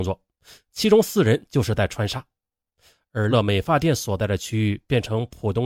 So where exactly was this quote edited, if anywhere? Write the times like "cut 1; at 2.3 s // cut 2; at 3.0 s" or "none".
cut 1; at 3.3 s